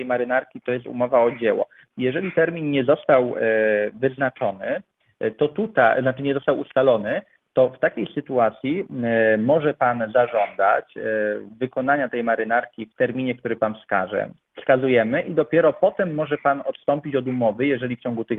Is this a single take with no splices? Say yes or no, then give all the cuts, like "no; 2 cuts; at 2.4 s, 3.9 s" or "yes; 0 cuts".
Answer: no; 1 cut; at 14.4 s